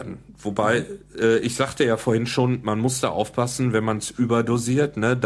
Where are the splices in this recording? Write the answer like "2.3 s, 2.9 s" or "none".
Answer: none